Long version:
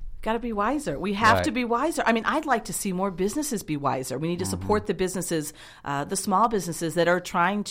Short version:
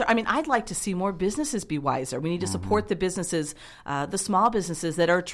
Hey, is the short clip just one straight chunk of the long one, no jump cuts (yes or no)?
yes